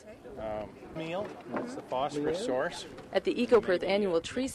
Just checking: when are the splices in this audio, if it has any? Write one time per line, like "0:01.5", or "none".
0:01.0